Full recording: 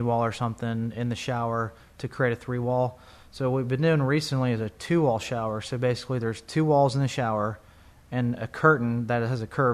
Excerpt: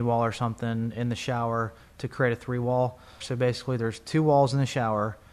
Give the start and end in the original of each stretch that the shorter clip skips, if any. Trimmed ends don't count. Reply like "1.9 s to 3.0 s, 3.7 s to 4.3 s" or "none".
3.2 s to 5.6 s

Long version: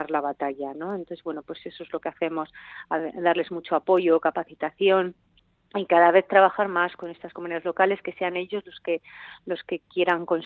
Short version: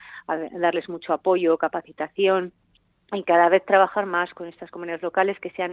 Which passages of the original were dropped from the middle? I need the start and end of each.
none

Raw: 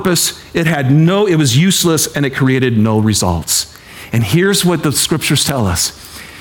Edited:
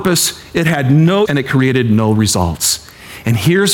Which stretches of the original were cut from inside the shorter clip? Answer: 1.3 s to 2.1 s

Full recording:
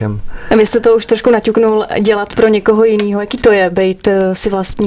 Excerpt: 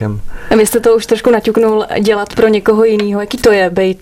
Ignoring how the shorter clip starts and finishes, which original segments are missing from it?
none

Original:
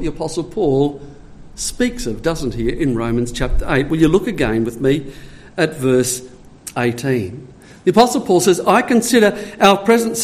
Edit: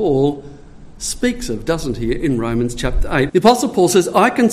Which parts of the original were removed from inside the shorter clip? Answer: 3.9 s to 7.8 s

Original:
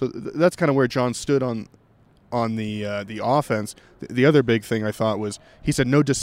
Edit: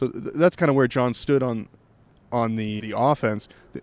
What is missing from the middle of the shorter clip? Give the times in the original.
2.8 s to 3.1 s

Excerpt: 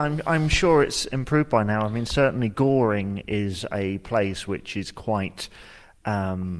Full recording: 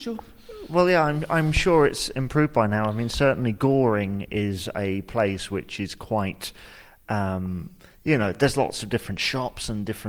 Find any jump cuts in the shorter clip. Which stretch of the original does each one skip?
none

